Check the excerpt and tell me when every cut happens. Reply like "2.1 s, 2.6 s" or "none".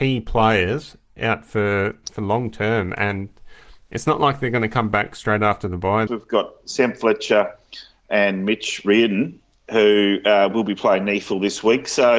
6.1 s